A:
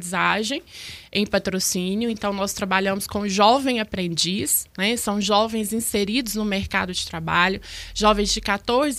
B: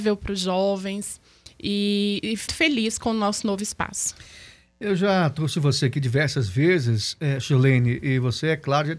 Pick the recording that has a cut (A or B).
B